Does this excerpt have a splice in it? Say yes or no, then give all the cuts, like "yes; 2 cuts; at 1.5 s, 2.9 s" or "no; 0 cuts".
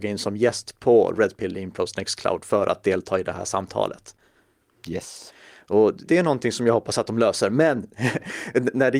yes; 1 cut; at 6.1 s